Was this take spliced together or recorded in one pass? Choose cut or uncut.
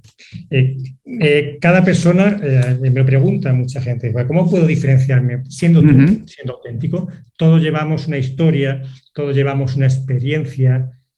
uncut